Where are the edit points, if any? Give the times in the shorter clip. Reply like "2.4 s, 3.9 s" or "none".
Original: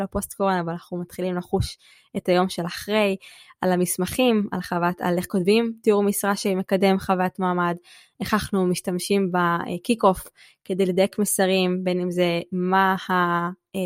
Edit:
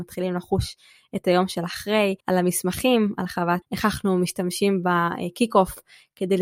2.2 s, 3.6 s